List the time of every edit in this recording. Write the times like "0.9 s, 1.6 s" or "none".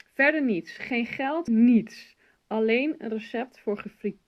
1.5 s